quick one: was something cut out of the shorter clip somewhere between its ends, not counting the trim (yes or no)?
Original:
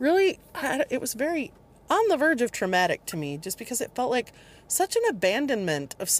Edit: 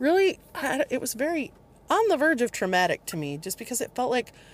no